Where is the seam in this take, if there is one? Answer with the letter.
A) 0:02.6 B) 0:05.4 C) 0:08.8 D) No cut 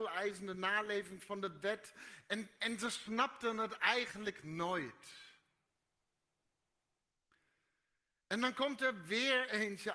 A